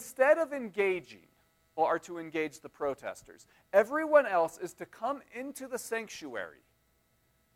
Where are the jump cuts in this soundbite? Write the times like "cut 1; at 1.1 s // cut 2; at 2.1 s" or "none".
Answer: cut 1; at 1.8 s